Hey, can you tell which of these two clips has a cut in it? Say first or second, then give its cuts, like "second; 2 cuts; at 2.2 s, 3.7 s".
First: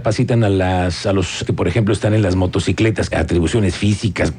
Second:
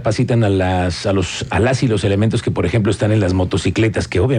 first; 2 cuts; at 1.5 s, 3.1 s